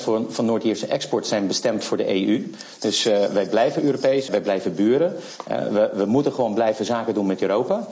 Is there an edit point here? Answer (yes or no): yes